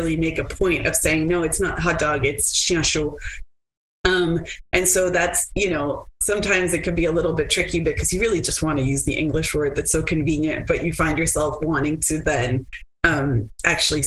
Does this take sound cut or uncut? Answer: uncut